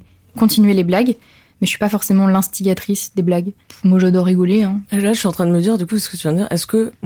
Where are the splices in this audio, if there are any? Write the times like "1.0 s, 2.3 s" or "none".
4.9 s